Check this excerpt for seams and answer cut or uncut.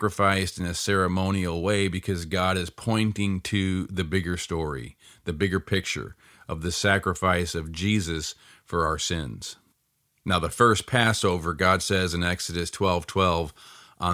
uncut